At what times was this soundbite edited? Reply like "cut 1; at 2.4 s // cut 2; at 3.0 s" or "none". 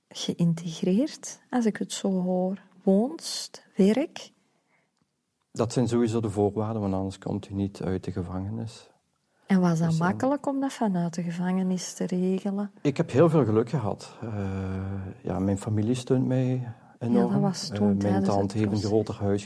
none